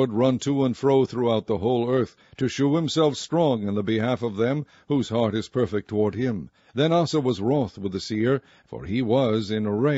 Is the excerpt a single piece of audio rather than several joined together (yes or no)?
no